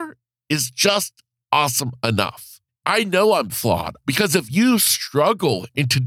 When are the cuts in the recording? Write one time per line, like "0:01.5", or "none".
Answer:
0:02.7
0:04.0